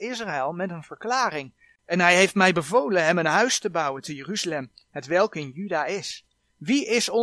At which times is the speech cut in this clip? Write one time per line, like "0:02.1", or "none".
0:01.8